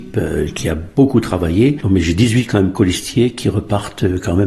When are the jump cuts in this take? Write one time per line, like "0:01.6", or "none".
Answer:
0:01.8